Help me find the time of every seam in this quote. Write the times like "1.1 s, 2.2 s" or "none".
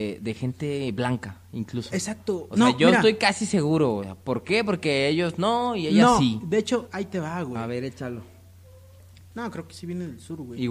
6.9 s, 9.3 s

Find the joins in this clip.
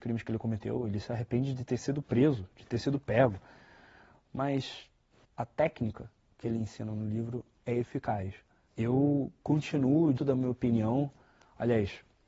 5.2 s, 8.7 s, 10.2 s

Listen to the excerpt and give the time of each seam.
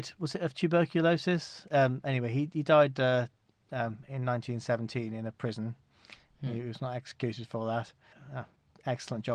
8.1 s

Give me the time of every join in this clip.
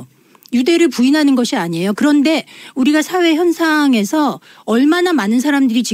none

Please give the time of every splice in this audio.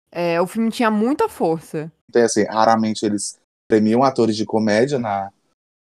2.1 s, 5.0 s

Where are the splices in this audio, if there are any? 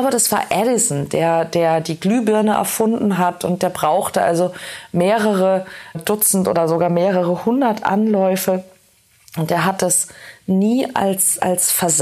5.9 s

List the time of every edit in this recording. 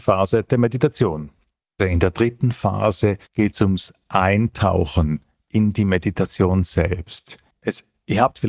1.8 s, 3.3 s

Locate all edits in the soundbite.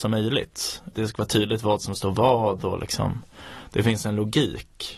0.9 s

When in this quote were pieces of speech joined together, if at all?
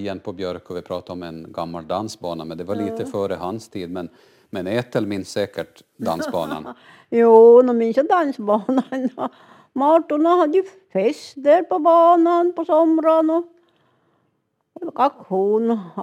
none

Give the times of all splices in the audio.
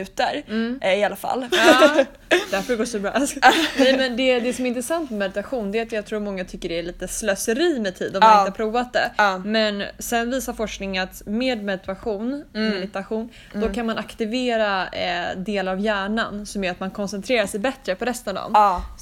1.5 s

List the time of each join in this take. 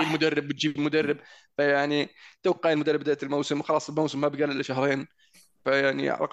none

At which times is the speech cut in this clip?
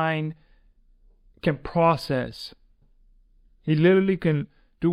none

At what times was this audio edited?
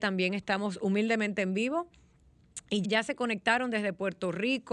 2.8 s

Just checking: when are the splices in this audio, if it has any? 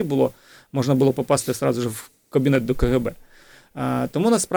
none

